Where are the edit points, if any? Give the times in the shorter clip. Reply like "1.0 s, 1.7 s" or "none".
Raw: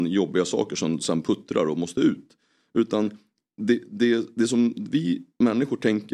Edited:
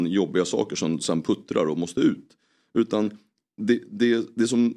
none